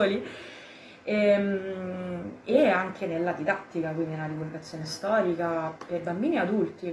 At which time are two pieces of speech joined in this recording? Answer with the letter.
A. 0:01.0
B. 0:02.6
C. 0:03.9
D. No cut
D